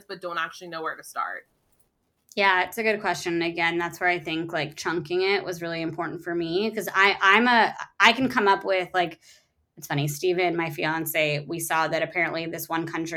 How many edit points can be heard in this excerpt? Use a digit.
0